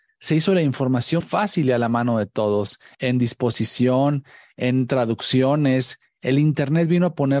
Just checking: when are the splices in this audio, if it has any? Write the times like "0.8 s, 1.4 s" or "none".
1.2 s, 2.9 s

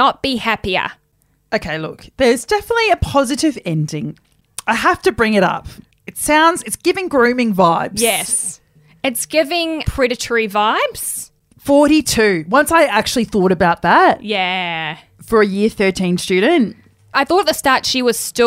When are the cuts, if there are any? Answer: 9.8 s

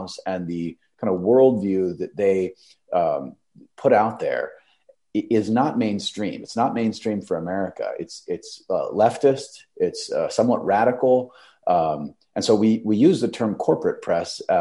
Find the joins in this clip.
none

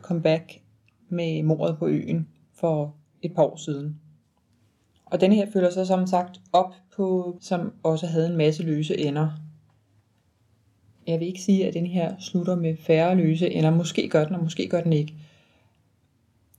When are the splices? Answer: 7.4 s

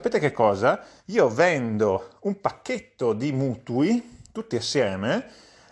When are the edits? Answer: none

